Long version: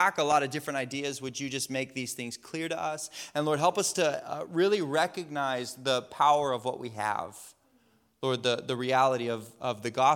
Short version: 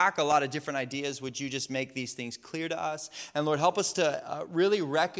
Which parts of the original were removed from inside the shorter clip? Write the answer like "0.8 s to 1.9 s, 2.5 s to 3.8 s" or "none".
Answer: none